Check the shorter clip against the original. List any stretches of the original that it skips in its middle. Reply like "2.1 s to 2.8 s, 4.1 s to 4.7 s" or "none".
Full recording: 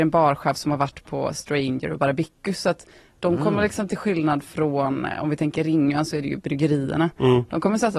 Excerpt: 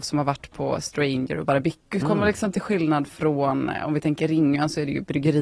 2.5 s to 3.4 s